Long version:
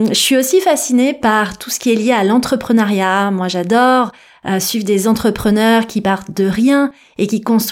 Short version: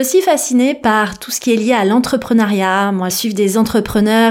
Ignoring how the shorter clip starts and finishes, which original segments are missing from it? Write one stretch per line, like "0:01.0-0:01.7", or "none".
0:03.5-0:04.6